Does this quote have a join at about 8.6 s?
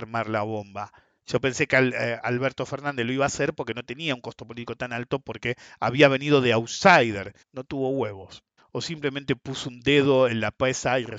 yes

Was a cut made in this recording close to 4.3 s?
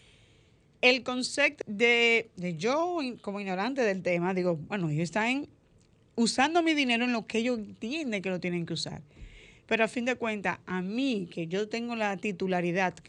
no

